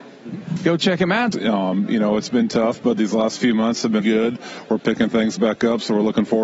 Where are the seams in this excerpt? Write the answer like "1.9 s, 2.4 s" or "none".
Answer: 1.3 s, 4.0 s